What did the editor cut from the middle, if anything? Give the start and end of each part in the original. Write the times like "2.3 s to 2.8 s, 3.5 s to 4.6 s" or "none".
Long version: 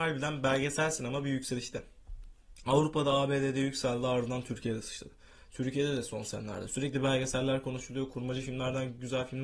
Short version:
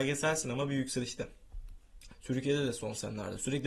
2.6 s to 5.4 s